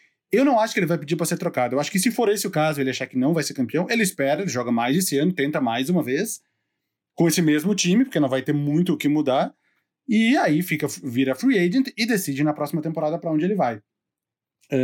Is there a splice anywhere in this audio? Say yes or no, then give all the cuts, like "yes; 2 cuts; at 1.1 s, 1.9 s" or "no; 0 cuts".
no; 0 cuts